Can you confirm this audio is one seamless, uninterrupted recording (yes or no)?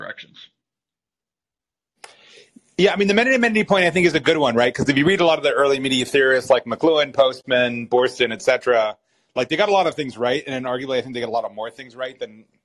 yes